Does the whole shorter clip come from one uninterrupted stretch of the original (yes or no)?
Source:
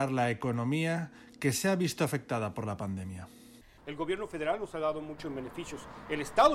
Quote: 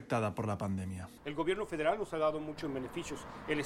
no